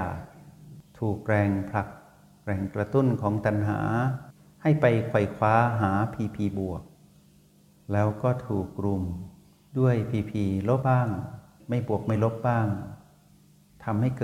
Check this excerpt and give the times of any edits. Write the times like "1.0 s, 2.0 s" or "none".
10.8 s

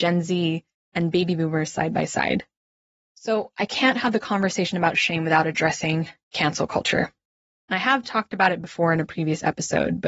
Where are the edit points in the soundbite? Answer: none

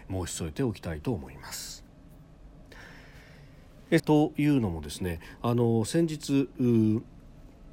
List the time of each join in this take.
4.0 s

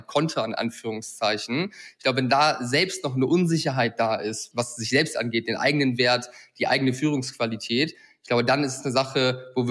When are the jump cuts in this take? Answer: 4.5 s

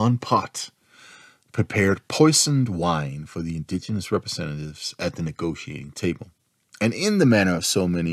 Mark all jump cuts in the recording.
none

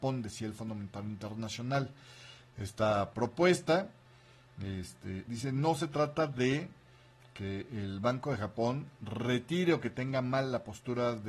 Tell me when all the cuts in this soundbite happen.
5.3 s

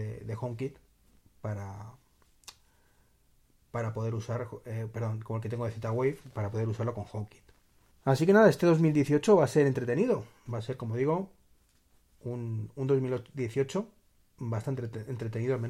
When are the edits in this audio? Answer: 7.9 s, 10.5 s

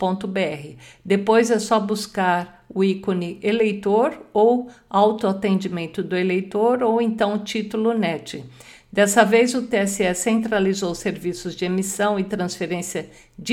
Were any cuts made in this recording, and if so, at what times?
none

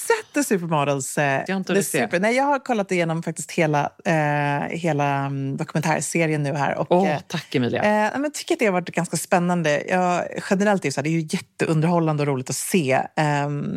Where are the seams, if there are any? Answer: 1.5 s

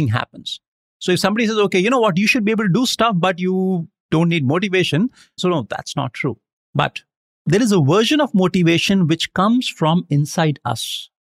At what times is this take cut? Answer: 5.4 s

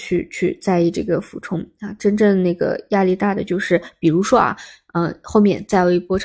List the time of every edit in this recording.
none

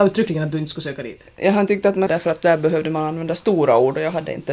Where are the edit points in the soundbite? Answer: 2.1 s

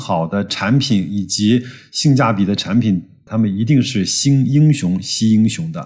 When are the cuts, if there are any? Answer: 3.3 s

